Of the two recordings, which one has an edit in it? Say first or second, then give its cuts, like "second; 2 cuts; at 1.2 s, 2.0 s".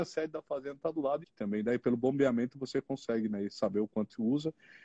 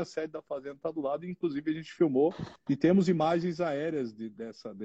first; 1 cut; at 1.2 s